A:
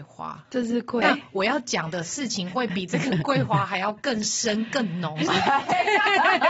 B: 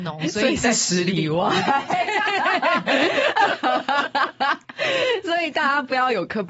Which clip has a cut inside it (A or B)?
A